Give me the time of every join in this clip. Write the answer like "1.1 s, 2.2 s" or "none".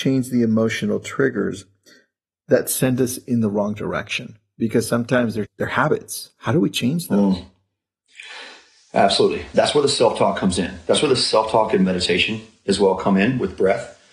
5.4 s